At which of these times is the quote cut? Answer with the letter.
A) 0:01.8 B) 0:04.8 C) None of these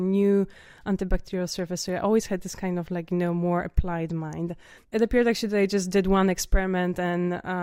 B